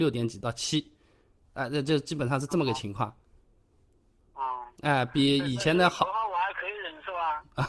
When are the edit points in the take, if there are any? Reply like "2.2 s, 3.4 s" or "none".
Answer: none